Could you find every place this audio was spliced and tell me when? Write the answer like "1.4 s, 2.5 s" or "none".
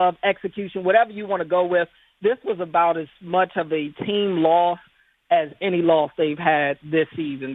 none